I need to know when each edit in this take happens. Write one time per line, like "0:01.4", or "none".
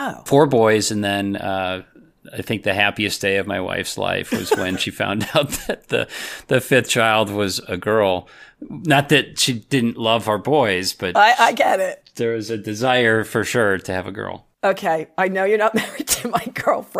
none